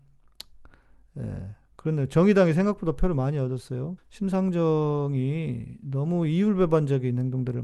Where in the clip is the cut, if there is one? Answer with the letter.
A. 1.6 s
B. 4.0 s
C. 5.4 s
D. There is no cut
B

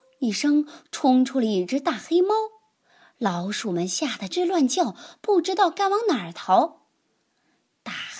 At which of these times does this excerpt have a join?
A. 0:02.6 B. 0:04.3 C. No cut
B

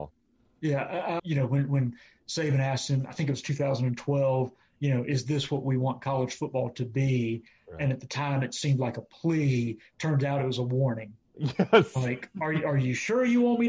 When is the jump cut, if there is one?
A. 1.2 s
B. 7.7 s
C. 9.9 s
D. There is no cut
A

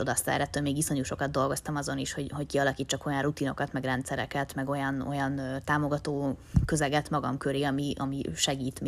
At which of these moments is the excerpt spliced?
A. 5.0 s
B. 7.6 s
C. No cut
C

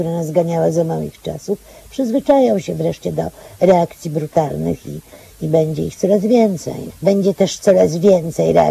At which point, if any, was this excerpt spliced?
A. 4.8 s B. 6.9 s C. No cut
B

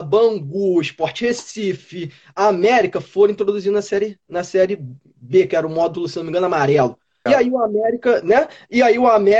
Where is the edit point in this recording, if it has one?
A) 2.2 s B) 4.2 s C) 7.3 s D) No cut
C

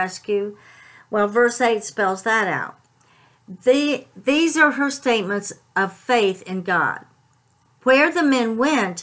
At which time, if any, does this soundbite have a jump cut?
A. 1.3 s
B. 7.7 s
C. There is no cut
B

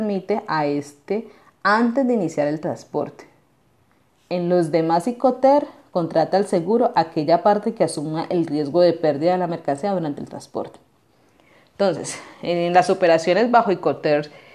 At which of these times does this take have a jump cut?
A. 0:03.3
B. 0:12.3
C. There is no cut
C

